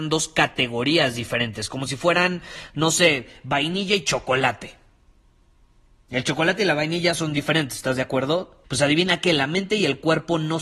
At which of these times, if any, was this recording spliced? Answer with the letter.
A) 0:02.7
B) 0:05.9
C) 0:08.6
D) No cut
C